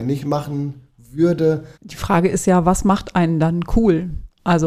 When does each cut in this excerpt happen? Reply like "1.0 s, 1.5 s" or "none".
1.7 s

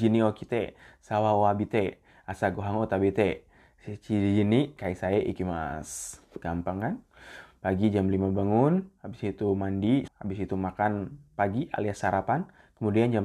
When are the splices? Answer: 10.1 s, 11.3 s

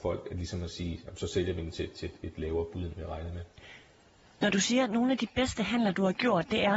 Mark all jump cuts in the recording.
none

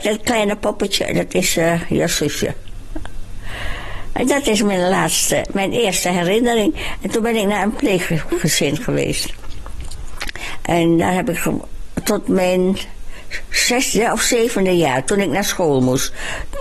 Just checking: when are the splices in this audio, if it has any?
10.6 s

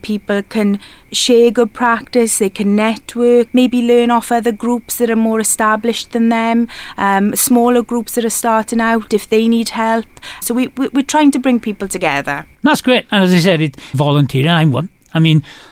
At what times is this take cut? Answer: 3.5 s, 10.4 s, 13.9 s

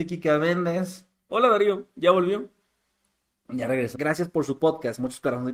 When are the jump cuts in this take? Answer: 1.3 s, 3.9 s

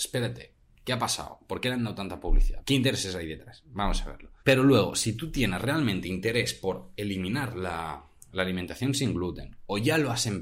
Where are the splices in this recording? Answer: 2.6 s, 4.4 s

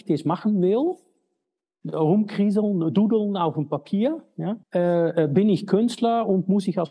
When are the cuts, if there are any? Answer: 4.6 s

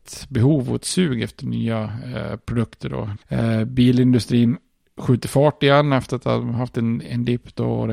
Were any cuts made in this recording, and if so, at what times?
3.2 s

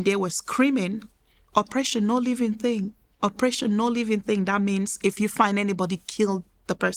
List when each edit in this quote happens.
none

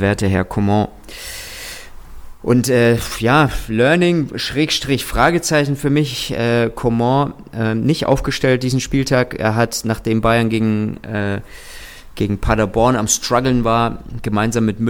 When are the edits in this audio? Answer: none

